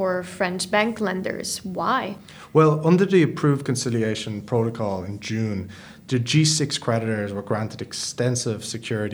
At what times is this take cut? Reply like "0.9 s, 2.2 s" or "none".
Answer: none

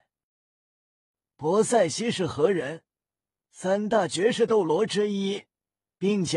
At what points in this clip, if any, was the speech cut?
1.2 s

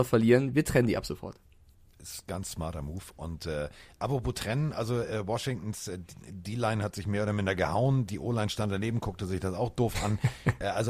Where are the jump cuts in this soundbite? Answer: none

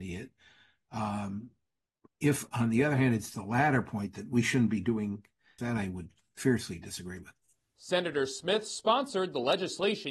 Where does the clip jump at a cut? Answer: 5.6 s

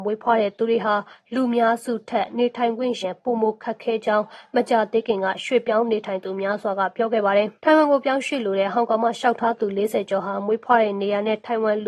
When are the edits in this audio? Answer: 3.0 s, 7.6 s

